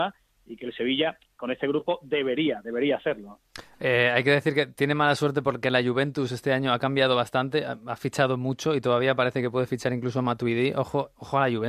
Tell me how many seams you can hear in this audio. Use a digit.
0